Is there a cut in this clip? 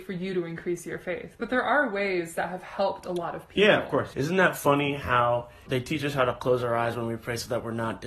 yes; 2 cuts; at 4.1 s, 5.7 s

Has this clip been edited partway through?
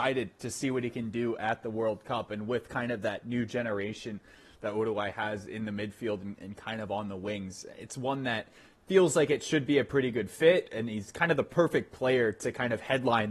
no; 0 cuts

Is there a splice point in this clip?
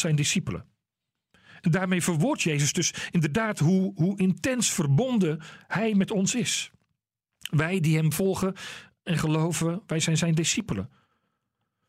no; 0 cuts

